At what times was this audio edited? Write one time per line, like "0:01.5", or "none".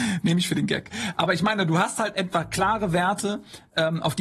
none

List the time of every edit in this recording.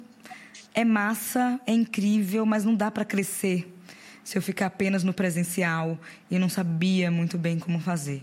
none

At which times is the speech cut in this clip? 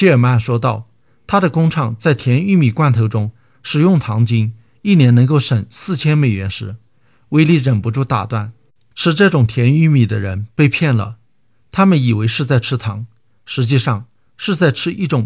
none

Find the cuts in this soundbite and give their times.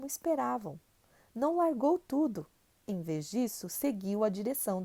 none

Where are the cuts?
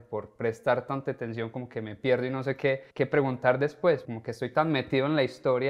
0:02.9
0:04.0

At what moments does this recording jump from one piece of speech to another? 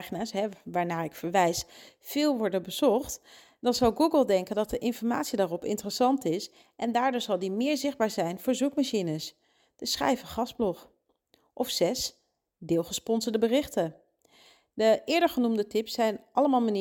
none

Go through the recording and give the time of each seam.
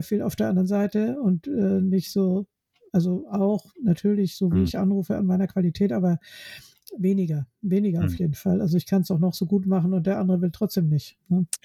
none

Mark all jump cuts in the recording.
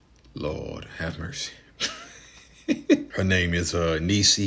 0:03.1

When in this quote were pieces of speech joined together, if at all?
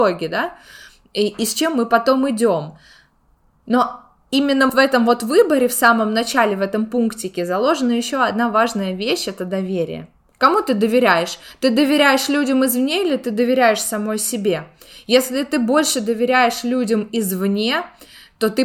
0:04.7

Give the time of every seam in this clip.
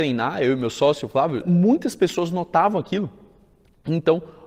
0:01.4

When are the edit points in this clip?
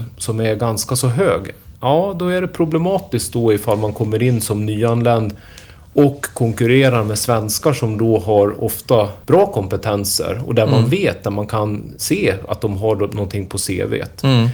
0:09.2

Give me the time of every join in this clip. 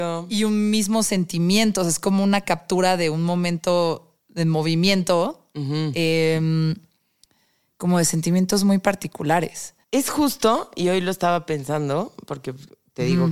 0:09.8

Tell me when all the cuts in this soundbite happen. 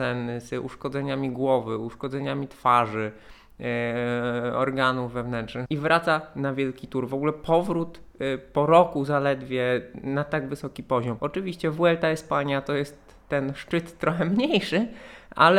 0:05.6
0:11.2

